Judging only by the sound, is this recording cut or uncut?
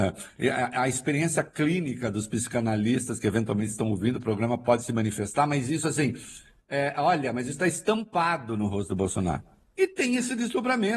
cut